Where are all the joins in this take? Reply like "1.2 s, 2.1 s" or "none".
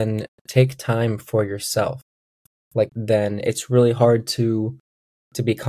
2.9 s